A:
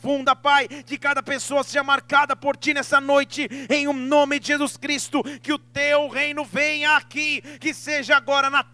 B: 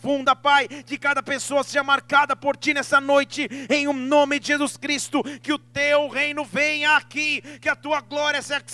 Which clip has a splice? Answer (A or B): A